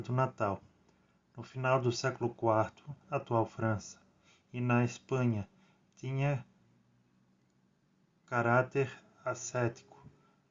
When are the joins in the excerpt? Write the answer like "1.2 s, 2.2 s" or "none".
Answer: 3.0 s

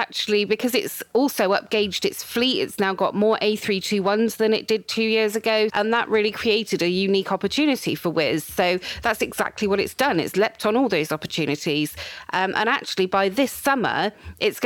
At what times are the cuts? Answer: 5.7 s

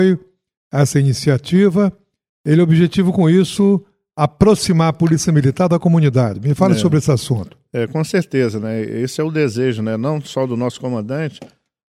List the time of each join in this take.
none

